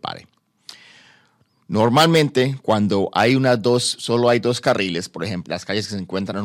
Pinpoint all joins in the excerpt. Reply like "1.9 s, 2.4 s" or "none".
5.5 s